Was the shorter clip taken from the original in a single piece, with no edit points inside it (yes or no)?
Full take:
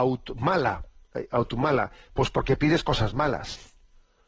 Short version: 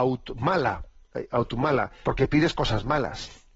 no